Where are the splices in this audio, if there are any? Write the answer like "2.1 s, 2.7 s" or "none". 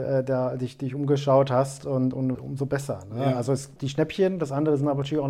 2.3 s, 3.8 s